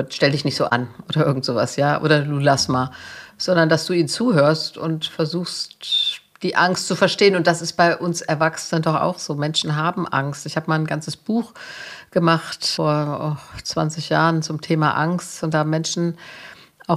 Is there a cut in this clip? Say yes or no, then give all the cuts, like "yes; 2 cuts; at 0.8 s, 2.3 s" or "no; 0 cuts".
no; 0 cuts